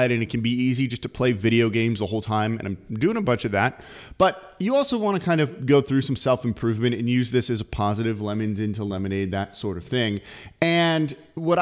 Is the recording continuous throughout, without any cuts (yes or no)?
yes